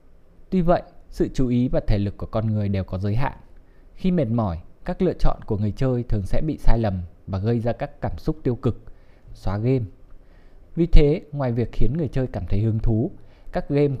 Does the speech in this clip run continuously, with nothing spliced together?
no; 2 cuts; at 9.3 s, 10.6 s

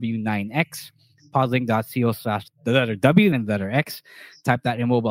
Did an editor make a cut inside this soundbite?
yes; 1 cut; at 3.3 s

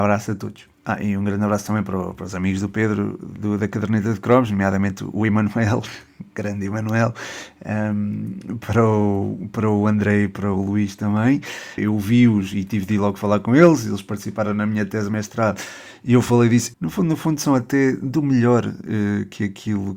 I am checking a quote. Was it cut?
yes; 2 cuts; at 11.8 s, 16.7 s

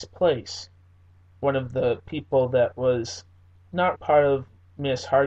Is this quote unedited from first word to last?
no; 2 cuts; at 1.4 s, 3.9 s

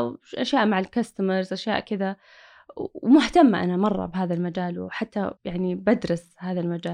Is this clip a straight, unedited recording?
no; 1 cut; at 5.4 s

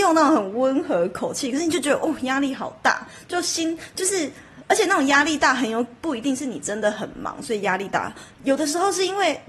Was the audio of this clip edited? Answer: no; 0 cuts

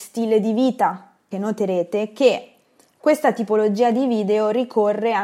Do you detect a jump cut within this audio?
yes; 1 cut; at 1.3 s

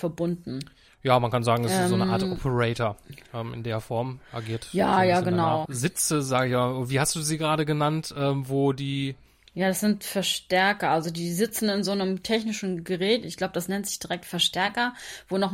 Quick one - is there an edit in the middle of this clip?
yes; 1 cut; at 5.7 s

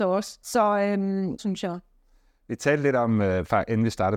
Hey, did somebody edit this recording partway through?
yes; 1 cut; at 1.4 s

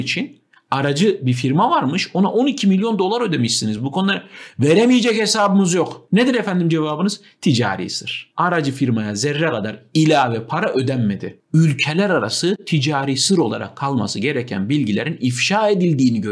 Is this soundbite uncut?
yes; 0 cuts

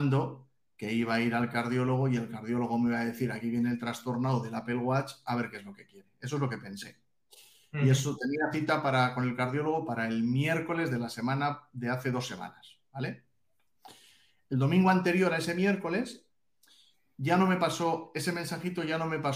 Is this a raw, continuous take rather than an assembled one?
yes; 0 cuts

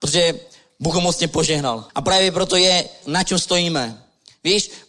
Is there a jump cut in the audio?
yes; 2 cuts; at 1.9 s, 3.0 s

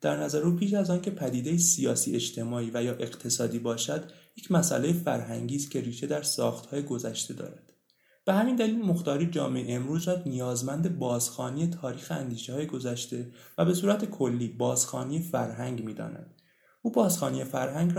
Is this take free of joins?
yes; 0 cuts

